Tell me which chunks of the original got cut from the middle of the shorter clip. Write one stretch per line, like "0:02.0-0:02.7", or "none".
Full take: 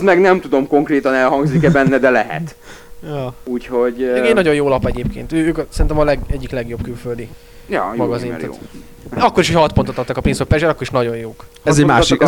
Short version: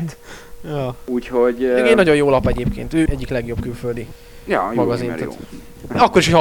0:05.4-0:06.3